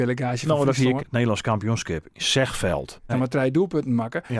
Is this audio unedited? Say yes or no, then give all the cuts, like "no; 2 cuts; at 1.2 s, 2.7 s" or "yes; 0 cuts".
no; 2 cuts; at 1.0 s, 3.1 s